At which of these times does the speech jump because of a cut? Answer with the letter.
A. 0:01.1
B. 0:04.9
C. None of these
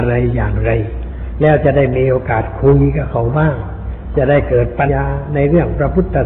B